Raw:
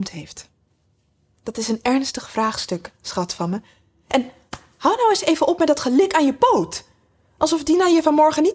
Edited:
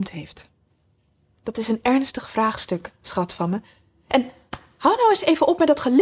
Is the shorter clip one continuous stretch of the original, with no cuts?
yes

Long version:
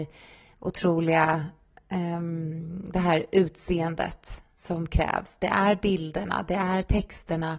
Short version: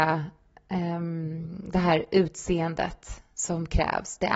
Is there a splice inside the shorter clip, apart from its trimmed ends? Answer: no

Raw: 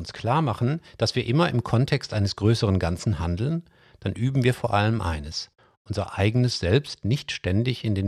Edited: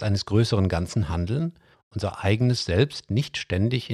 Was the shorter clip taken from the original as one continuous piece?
no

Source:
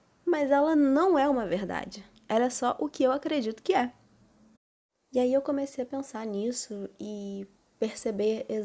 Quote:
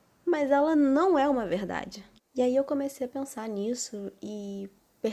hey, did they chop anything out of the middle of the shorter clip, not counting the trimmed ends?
yes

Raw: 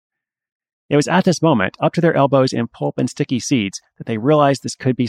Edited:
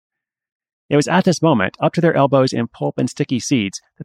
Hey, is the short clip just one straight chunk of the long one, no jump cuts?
yes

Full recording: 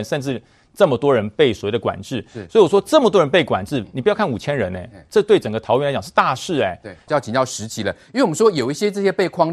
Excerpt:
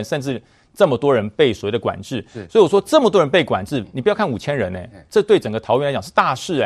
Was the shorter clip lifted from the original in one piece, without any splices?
yes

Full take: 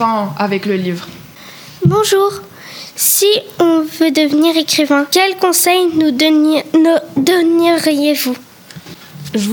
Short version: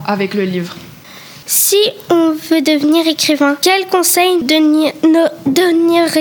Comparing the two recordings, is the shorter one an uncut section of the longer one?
no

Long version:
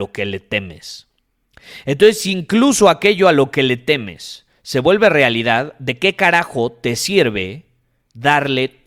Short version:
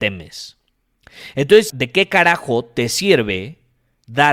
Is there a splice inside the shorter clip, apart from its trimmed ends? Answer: yes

